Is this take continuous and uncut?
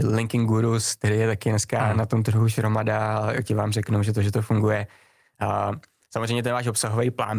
yes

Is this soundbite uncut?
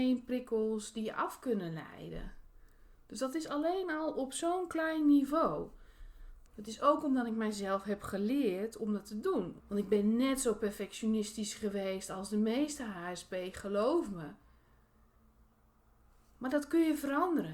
no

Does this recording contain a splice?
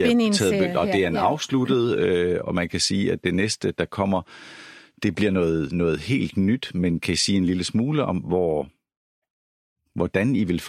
yes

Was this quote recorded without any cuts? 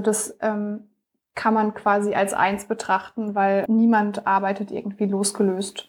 no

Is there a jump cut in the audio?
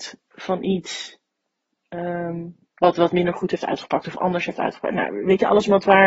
no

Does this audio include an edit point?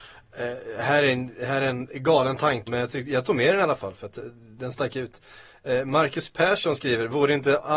yes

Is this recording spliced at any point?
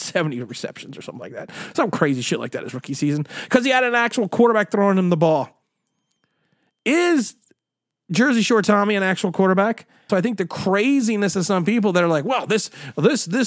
yes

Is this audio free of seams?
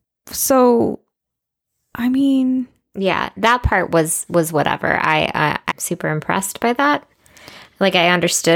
no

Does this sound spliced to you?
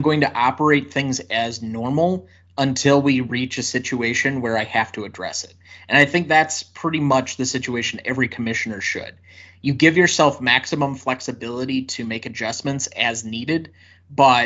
no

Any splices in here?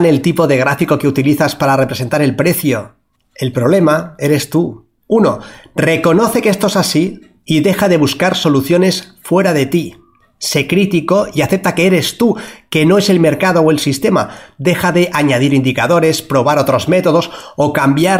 yes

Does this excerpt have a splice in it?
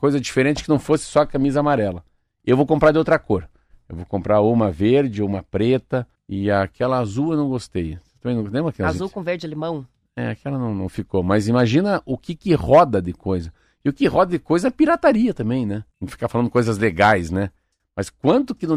yes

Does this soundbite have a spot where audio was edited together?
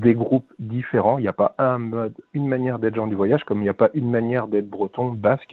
no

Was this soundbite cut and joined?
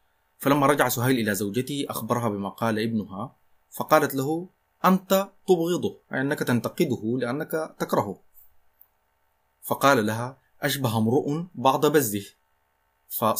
yes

